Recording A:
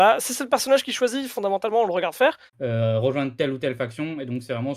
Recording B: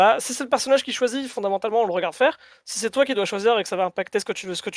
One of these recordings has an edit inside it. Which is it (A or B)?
A